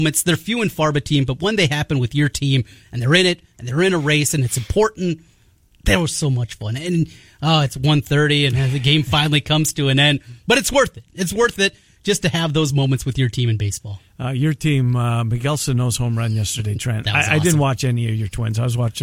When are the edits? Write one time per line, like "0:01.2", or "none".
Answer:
none